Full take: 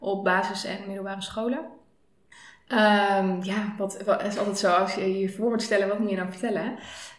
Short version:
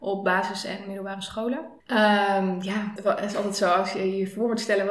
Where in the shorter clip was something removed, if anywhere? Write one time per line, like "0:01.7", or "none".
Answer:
0:01.8
0:03.0